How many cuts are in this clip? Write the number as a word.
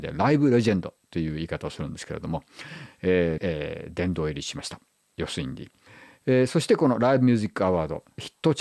one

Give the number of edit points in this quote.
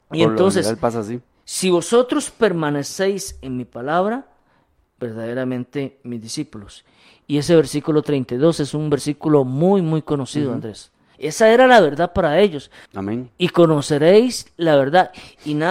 three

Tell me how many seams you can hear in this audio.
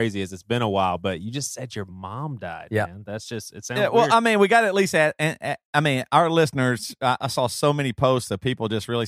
one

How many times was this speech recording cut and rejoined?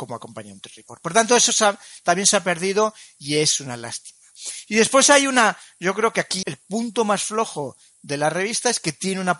one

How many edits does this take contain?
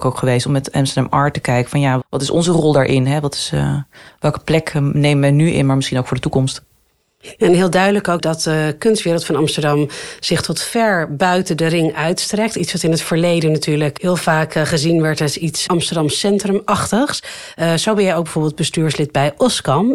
one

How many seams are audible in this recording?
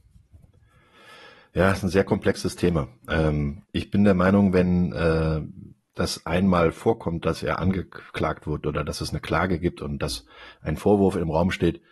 one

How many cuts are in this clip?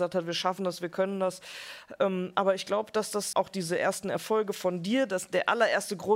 one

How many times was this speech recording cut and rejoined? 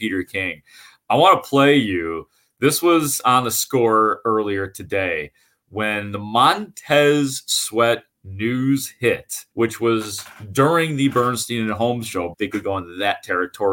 two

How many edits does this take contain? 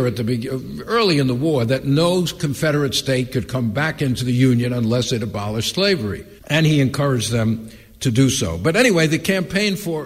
one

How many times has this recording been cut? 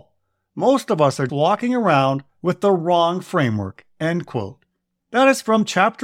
one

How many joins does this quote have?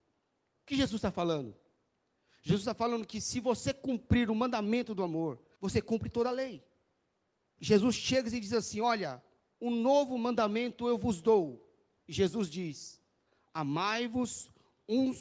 two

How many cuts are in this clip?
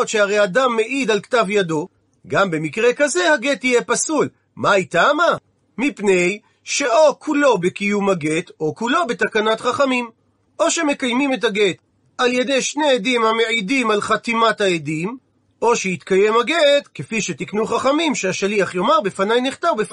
zero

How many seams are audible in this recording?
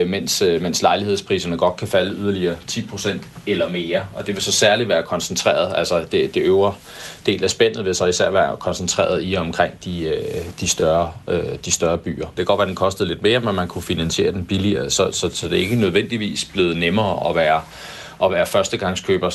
one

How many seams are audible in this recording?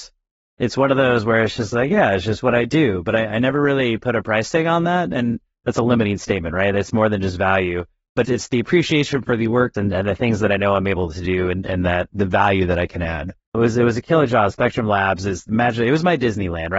three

